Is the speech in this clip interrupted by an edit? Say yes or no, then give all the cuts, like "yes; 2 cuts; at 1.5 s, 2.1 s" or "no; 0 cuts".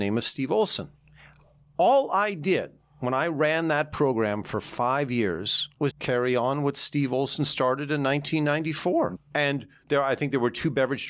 yes; 2 cuts; at 5.9 s, 9.2 s